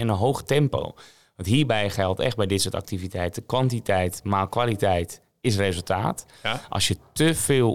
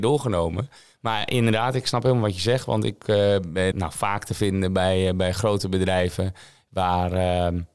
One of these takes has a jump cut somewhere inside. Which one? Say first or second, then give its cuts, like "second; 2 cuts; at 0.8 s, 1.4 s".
second; 1 cut; at 3.7 s